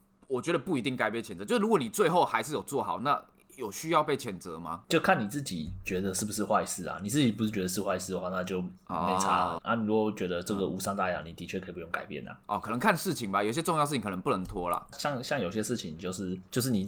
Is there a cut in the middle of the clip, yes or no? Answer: yes